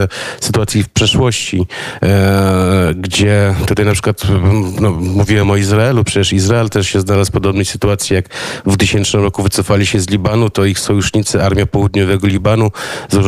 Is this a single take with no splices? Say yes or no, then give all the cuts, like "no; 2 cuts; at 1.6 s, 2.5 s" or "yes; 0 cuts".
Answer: yes; 0 cuts